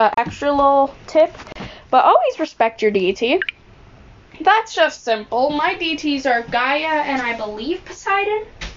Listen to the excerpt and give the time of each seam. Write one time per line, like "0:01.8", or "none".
none